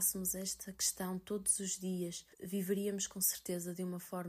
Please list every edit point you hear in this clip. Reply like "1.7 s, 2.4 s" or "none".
2.3 s